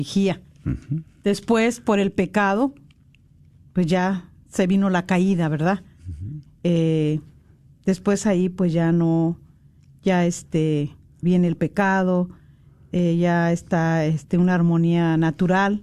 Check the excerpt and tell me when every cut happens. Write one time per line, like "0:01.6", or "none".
0:06.5
0:11.2